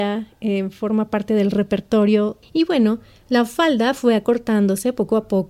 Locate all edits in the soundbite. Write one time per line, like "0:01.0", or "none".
0:02.4